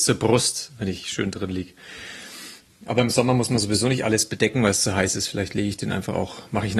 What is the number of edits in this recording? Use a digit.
0